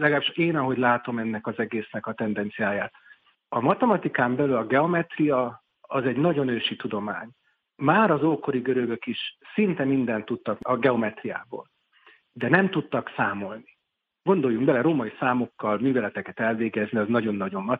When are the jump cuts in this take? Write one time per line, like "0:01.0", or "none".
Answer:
none